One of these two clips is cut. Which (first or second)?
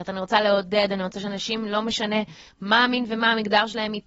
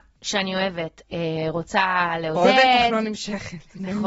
second